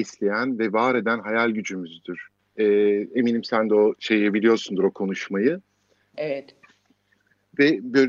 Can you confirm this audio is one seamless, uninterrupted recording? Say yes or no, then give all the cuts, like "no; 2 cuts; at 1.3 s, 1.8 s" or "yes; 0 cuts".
no; 2 cuts; at 2.4 s, 6.1 s